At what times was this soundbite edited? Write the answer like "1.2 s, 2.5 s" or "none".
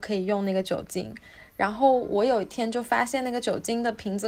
none